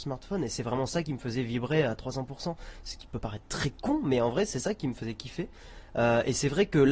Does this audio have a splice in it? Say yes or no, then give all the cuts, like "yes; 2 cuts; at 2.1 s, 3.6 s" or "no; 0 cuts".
no; 0 cuts